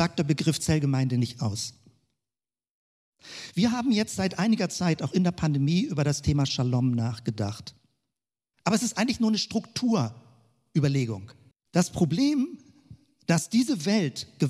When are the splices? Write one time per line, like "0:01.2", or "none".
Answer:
0:08.5
0:11.5